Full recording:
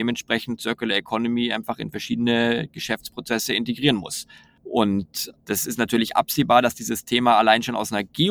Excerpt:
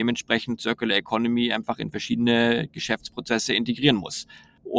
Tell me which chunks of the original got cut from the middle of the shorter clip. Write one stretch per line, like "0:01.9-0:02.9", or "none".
none